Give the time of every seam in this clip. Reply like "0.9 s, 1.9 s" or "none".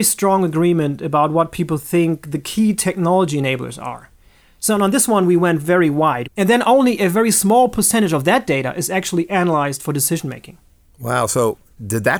6.2 s